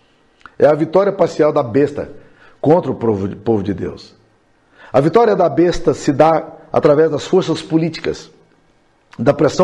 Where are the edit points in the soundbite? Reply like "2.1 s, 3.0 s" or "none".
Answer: none